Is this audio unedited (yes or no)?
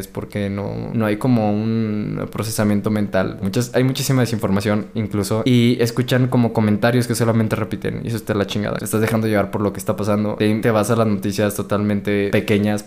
no